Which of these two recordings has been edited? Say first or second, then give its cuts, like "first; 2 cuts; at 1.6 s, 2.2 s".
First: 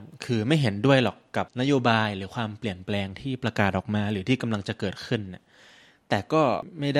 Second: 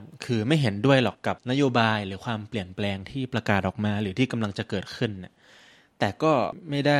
second; 1 cut; at 1.1 s